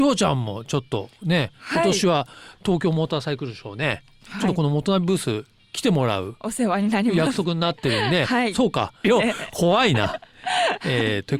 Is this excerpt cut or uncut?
cut